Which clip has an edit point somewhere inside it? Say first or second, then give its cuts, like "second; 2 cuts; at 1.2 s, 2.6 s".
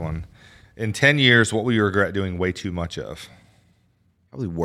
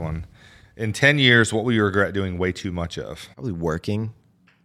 second; 1 cut; at 3.3 s